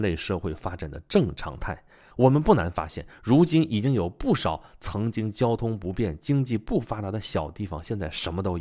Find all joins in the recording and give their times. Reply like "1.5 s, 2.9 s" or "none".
2.1 s